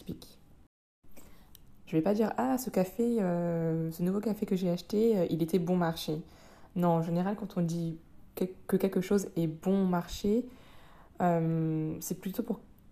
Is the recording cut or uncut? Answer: cut